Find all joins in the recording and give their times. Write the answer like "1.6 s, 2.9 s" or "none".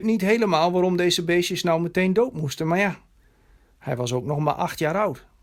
none

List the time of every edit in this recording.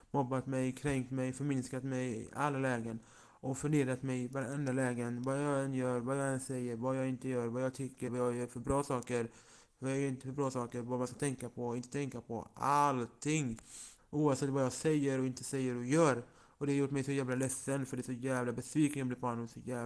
8.1 s, 14.0 s

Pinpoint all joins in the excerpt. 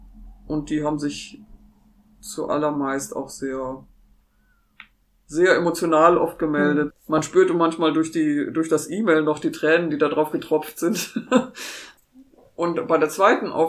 6.9 s

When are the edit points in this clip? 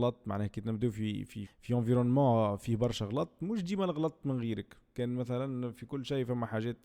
1.5 s

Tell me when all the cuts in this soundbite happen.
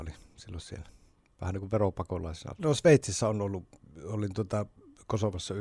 2.6 s

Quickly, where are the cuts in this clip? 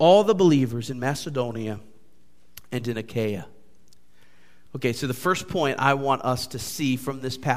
none

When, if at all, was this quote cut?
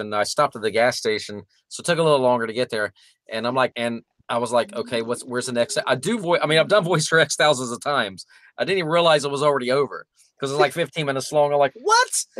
3.7 s

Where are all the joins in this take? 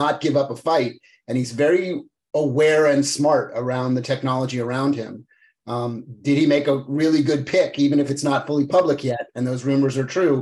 none

